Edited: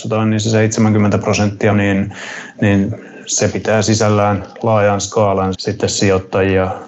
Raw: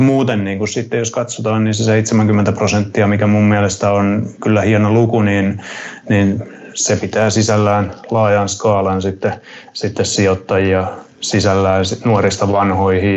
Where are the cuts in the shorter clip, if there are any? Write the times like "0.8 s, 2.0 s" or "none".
1.7 s, 5.5 s